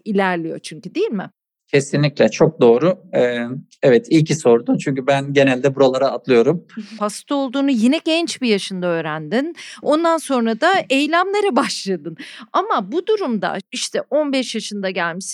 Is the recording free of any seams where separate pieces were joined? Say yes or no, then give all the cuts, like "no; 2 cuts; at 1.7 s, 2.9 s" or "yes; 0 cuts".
no; 1 cut; at 7.0 s